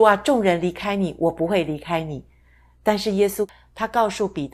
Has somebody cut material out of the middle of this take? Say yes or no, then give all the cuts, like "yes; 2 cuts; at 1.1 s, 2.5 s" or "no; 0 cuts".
no; 0 cuts